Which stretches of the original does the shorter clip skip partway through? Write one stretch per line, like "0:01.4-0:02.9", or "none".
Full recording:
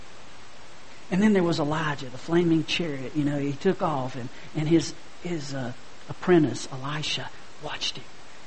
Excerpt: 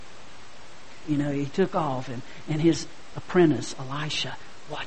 0:01.0-0:03.1
0:05.2-0:06.1